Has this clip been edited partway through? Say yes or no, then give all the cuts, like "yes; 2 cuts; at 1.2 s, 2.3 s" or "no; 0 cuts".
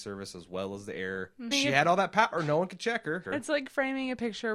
yes; 2 cuts; at 1.5 s, 3.2 s